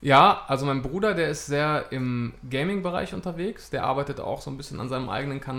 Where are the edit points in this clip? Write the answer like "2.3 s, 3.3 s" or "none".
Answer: none